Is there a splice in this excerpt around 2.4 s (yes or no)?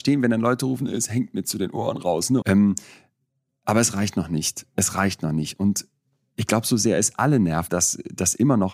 yes